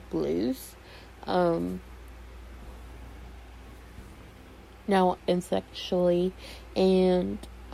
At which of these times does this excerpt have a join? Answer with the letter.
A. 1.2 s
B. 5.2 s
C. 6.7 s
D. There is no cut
B